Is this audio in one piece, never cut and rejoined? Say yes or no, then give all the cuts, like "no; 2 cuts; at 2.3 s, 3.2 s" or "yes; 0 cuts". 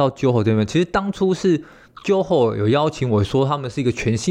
yes; 0 cuts